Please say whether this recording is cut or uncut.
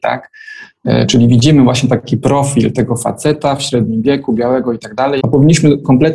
cut